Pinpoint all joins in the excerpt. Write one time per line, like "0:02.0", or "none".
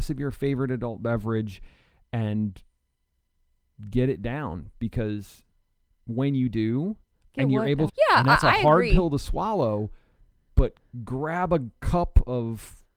0:07.9